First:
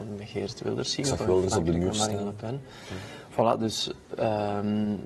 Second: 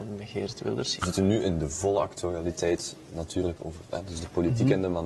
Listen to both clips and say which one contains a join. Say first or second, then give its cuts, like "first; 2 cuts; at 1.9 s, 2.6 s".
second; 2 cuts; at 1.0 s, 3.6 s